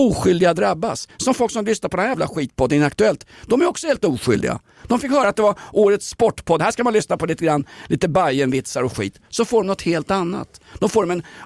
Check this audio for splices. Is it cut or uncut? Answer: uncut